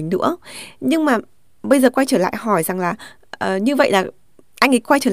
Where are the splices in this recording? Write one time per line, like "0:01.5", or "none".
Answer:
none